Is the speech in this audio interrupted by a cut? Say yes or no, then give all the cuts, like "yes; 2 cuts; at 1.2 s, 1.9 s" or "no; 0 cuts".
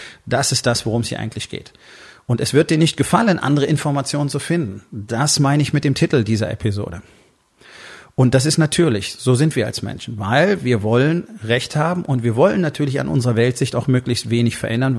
no; 0 cuts